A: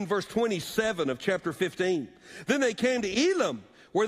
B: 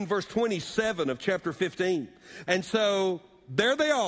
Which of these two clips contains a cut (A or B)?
B